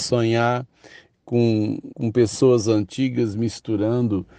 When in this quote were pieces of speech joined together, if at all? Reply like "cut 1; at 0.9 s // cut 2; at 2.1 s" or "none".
cut 1; at 1.9 s